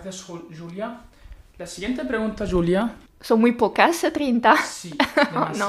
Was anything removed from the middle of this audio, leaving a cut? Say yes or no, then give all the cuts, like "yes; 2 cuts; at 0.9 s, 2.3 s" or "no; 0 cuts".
yes; 1 cut; at 3.1 s